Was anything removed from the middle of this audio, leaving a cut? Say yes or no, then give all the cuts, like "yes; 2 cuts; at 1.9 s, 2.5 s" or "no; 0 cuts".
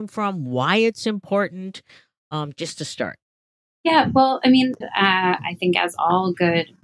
yes; 1 cut; at 4.8 s